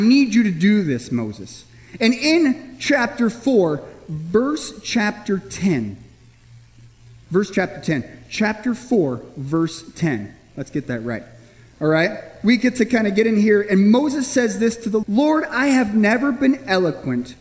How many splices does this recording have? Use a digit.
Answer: 1